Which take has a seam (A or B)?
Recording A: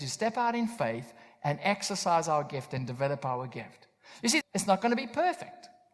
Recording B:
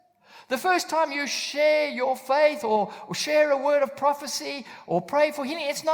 A